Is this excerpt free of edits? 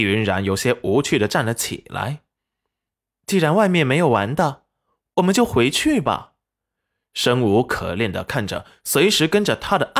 yes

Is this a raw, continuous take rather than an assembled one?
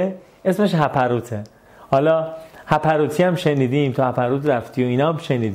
yes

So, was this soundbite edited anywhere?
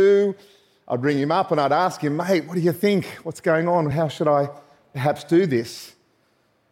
no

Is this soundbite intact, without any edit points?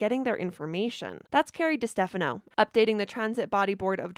no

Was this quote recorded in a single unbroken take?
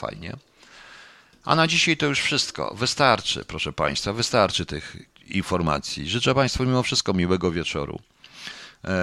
yes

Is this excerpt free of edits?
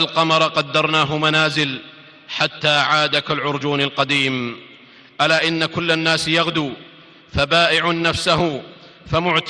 yes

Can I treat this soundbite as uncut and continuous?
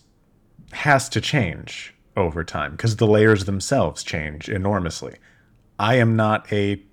yes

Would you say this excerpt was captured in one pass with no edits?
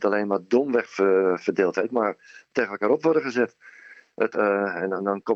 no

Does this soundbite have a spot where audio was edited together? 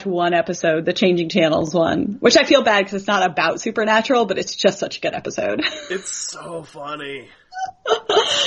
no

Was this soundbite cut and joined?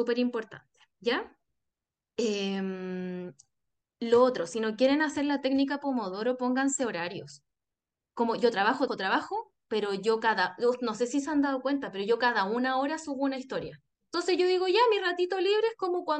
yes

